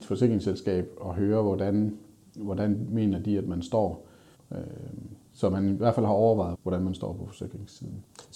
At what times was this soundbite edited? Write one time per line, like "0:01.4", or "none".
0:04.3
0:06.5